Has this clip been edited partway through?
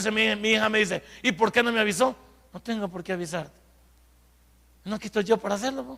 no; 0 cuts

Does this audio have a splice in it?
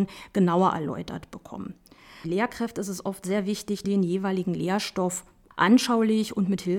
yes; 2 cuts; at 2.2 s, 3.8 s

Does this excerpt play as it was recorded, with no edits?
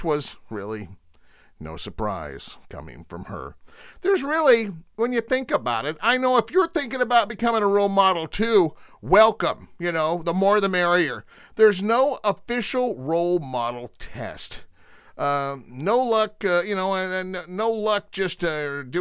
yes; 0 cuts

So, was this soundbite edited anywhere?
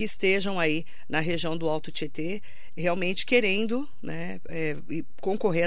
no; 0 cuts

